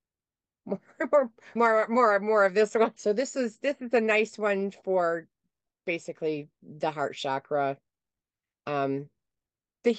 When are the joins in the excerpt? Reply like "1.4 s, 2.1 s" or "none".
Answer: 1.6 s, 3.0 s